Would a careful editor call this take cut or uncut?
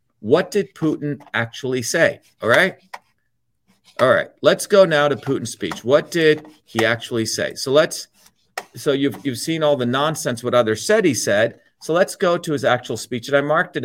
uncut